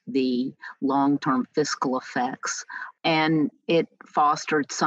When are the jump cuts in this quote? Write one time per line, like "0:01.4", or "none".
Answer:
0:03.0